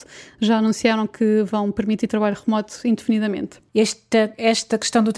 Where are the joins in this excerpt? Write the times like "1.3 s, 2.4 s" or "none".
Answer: 3.7 s